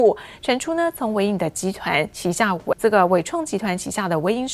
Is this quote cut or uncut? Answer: cut